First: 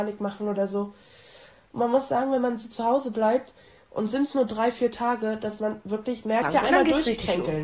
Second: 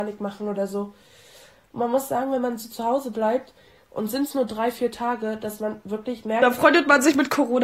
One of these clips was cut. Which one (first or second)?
first